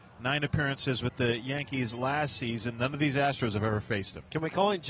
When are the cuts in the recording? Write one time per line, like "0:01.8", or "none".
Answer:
none